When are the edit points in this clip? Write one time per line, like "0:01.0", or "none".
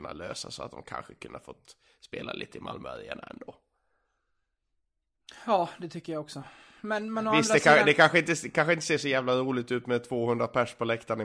none